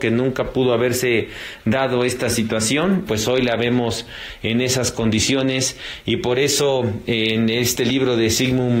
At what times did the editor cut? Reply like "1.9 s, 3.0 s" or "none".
3.1 s